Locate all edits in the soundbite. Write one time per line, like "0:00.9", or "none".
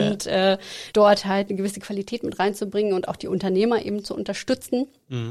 0:00.9